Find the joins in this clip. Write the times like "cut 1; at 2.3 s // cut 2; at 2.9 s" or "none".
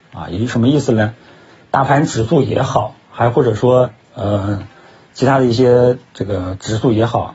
cut 1; at 1.6 s

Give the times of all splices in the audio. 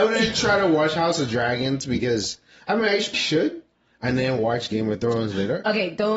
cut 1; at 3.1 s

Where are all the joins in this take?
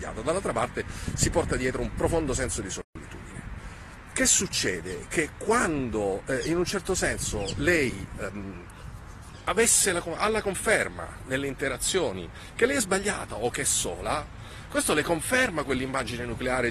none

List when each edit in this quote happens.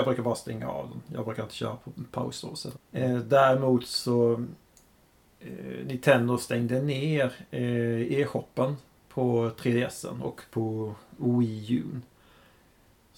cut 1; at 2.8 s

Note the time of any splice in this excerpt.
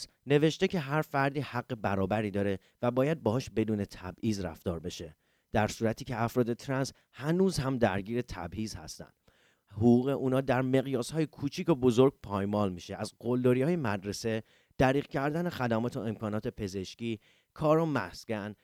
cut 1; at 17.5 s

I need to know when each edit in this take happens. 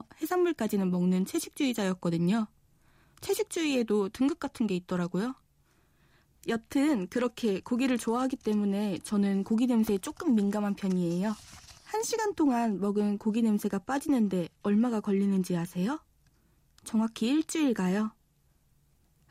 cut 1; at 11.8 s

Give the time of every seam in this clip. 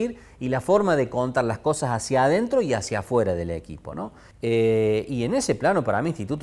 cut 1; at 4.3 s

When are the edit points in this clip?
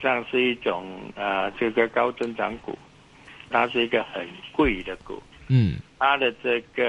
cut 1; at 3.5 s

